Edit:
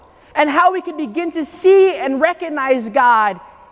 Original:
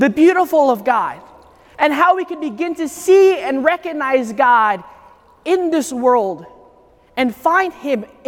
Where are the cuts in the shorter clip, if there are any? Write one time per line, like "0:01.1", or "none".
none